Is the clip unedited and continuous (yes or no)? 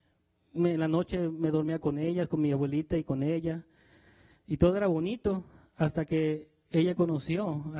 yes